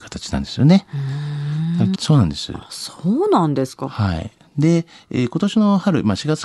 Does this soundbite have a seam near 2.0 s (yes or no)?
yes